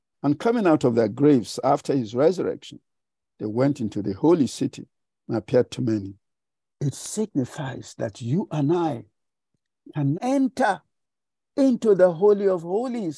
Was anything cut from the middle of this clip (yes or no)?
yes